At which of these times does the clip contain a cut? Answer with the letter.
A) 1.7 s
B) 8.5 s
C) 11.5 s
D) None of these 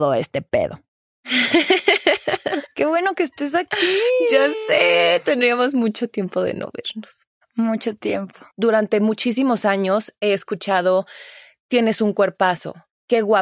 B